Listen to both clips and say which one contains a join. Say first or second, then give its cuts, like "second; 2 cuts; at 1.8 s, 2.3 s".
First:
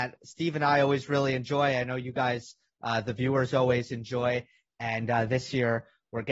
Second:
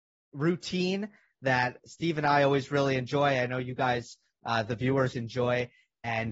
second; 1 cut; at 5.1 s